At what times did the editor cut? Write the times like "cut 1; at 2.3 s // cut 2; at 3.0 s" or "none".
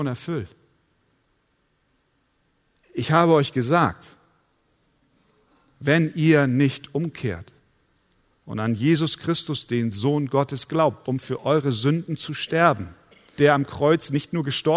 cut 1; at 11.0 s // cut 2; at 13.4 s